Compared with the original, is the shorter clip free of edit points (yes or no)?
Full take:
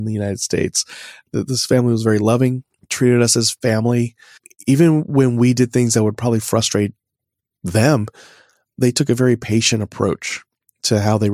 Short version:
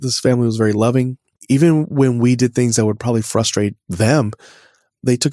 no